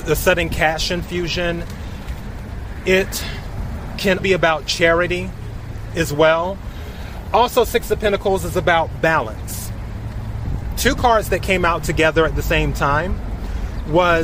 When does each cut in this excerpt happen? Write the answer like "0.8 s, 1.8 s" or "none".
4.2 s

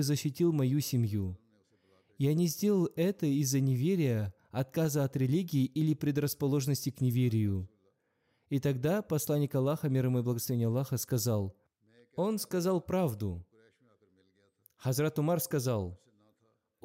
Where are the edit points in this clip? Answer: none

